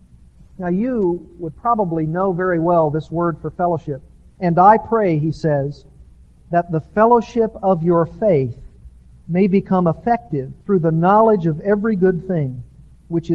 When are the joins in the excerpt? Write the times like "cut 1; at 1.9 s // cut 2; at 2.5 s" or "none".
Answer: cut 1; at 4.4 s // cut 2; at 10.6 s